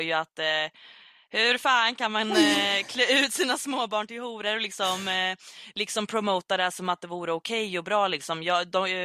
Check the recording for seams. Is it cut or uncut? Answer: uncut